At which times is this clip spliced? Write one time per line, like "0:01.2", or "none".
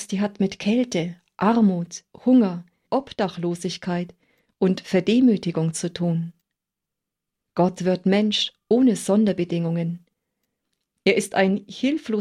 0:02.9